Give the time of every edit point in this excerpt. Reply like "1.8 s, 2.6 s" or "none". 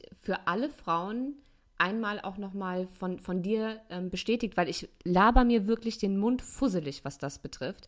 none